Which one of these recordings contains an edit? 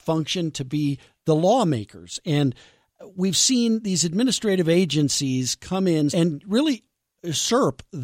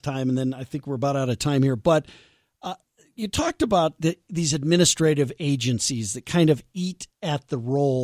first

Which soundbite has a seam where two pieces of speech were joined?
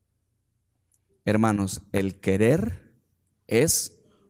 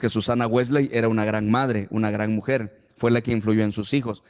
first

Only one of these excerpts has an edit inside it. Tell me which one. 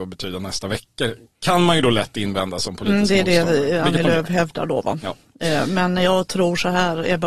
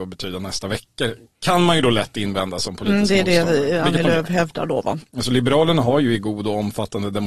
second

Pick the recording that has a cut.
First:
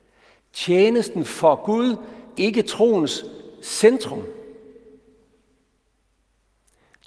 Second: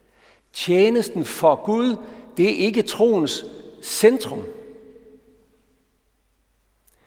first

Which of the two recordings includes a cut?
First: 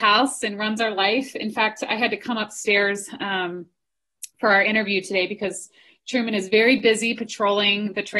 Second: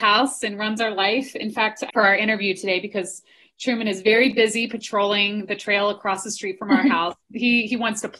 second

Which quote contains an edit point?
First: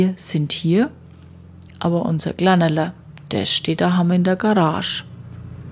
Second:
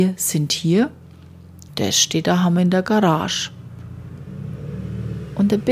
second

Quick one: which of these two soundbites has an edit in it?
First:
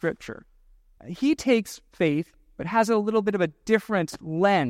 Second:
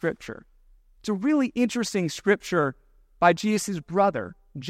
first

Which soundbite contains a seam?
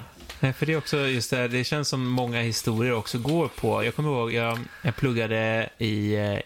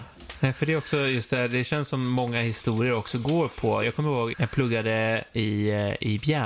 second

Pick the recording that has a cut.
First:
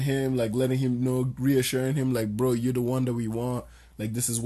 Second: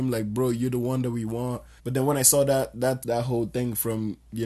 second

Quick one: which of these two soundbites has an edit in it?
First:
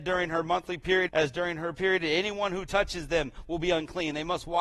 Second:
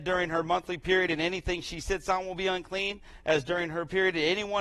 first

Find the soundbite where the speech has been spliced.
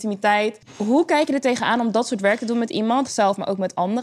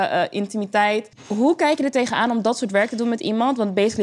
first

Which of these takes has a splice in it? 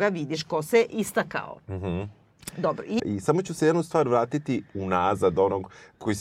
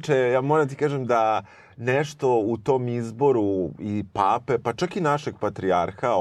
first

